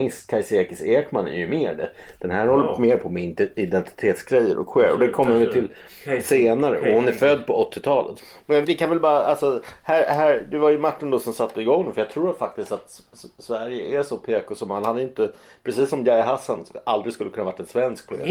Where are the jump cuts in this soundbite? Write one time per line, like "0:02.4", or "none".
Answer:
0:08.6

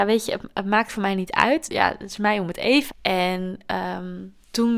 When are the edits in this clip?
0:01.7
0:02.9

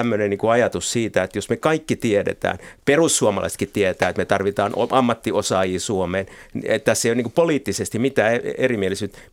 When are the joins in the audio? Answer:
none

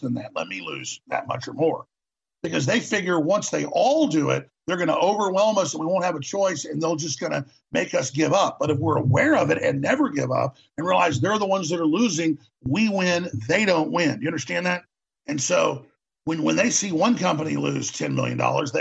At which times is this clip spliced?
0:15.2

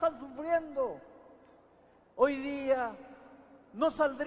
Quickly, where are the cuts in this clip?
0:02.0

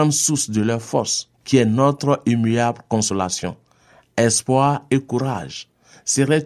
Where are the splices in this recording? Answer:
0:01.3

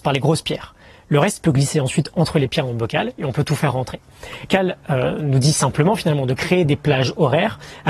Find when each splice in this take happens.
0:04.5

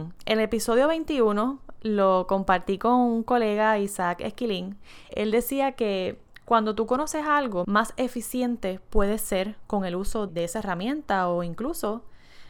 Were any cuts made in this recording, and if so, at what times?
0:05.1
0:07.6
0:10.3

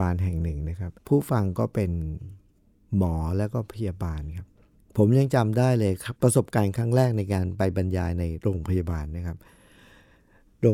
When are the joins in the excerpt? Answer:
0:01.0
0:06.2

